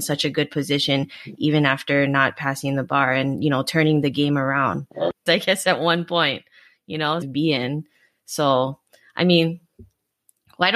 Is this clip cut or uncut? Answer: cut